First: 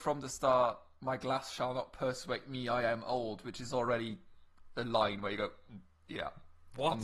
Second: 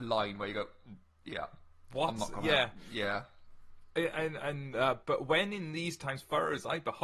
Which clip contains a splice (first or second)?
second